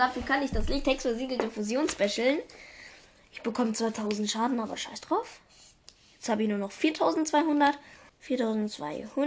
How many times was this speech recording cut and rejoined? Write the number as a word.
one